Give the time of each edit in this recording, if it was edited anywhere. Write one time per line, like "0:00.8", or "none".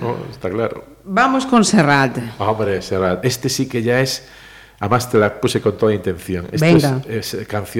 none

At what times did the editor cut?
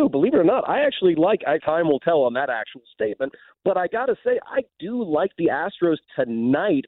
0:01.6

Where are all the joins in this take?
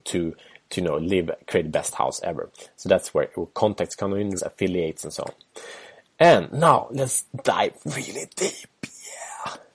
0:04.4

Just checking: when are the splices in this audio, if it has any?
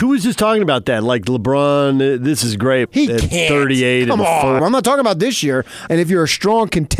0:02.9
0:04.6
0:05.9

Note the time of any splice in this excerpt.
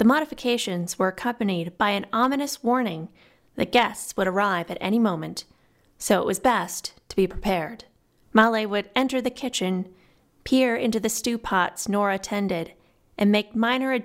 0:08.2

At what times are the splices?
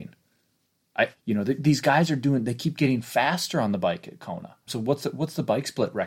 0:01.1
0:04.7

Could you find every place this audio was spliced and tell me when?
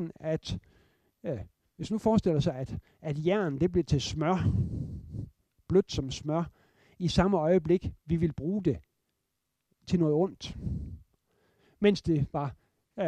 none

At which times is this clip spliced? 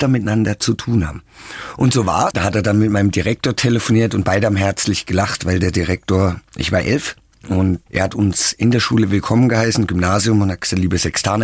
0:02.3

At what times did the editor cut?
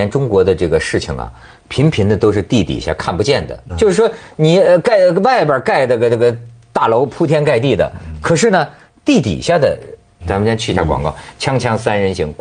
0:03.7
0:10.2

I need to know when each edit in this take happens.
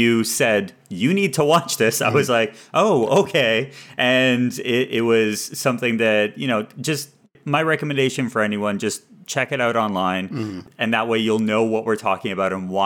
none

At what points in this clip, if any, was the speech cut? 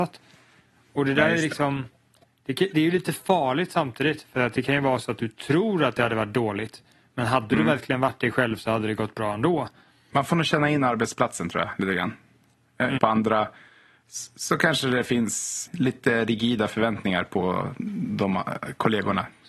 0:13.0
0:15.7

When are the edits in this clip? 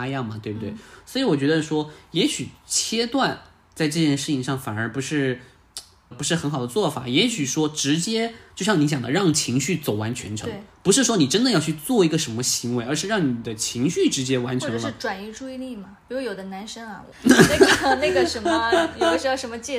0:06.1
0:17.1

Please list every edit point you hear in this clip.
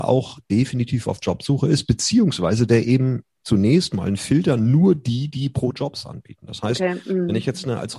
none

